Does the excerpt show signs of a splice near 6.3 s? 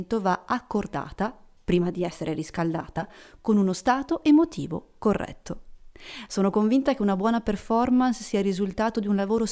no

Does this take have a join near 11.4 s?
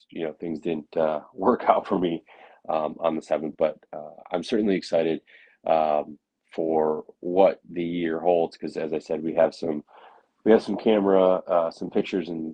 no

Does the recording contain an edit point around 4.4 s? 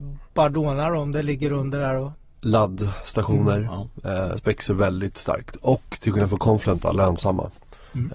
yes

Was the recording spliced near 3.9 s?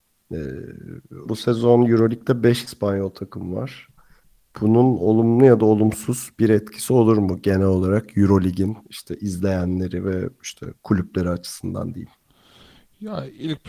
no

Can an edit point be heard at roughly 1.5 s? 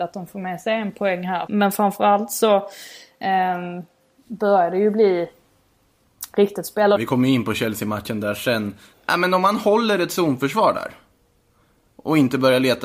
yes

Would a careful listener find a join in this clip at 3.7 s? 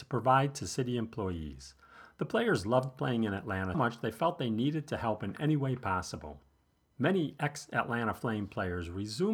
yes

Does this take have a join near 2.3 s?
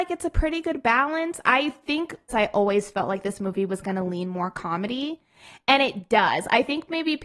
yes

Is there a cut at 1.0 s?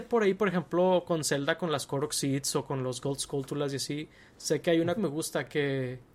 no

